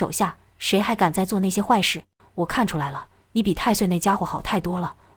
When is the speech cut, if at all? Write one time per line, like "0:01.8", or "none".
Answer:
0:02.2